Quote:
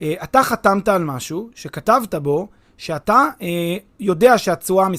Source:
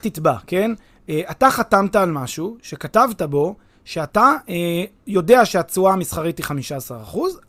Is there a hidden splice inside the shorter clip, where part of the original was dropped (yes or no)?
no